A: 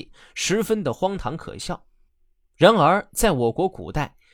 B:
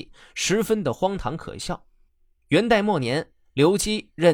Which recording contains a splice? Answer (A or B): B